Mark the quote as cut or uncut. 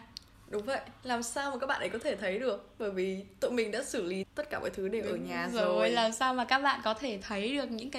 cut